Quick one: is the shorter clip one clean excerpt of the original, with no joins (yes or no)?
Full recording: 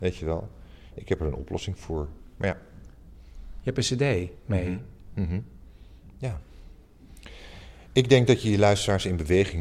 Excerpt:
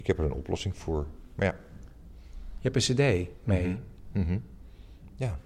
yes